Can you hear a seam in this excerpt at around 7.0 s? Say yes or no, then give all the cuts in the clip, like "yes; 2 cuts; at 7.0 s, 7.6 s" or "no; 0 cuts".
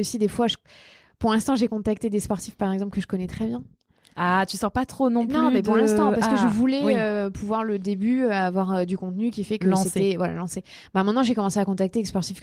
no; 0 cuts